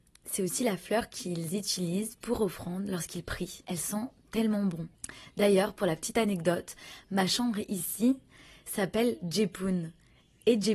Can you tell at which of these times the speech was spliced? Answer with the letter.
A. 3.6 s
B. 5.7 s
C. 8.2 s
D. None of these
A